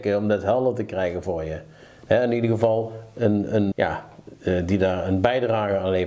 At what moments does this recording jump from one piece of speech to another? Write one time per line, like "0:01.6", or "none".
0:03.7